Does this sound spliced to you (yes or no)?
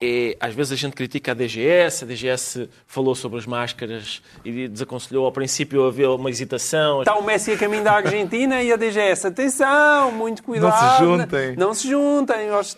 yes